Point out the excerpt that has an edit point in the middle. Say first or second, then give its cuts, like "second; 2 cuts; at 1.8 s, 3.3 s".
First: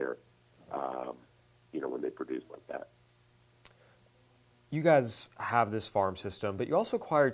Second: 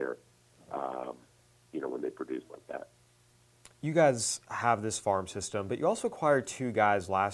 second; 1 cut; at 3.7 s